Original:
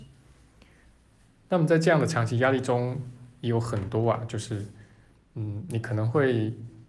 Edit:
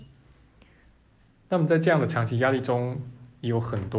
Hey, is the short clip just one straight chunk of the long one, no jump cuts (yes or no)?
yes